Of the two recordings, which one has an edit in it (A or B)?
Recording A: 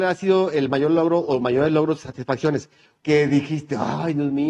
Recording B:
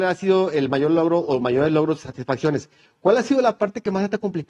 A